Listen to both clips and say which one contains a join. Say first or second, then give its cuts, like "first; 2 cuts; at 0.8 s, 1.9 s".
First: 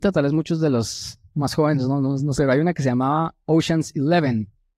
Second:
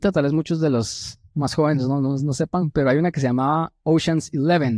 first; 1 cut; at 2.4 s